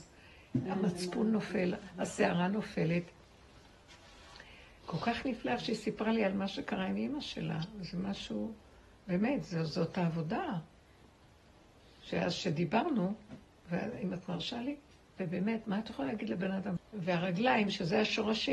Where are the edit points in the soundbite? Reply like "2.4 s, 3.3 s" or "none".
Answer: 15.2 s, 16.8 s